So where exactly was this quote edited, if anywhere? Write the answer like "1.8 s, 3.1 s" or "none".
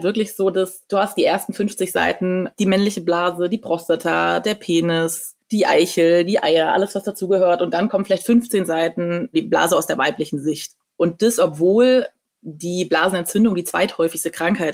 none